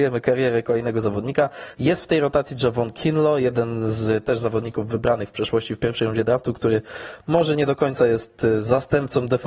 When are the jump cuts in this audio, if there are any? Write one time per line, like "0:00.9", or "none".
none

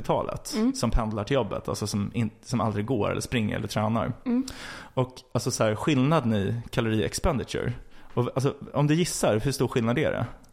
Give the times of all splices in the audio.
none

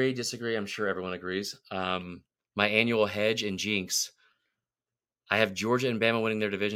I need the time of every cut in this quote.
0:02.4

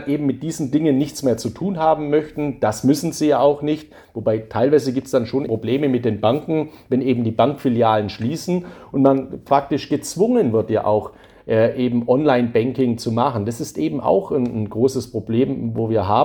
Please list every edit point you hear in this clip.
0:05.5

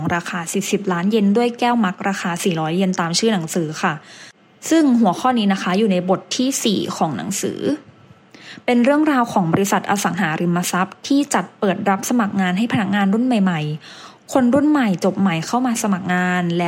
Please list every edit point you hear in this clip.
none

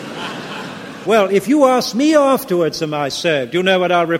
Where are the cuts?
0:01.1

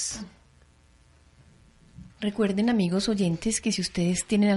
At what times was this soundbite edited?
0:02.1

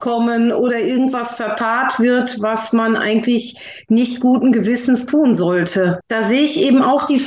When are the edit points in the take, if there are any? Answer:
0:06.0

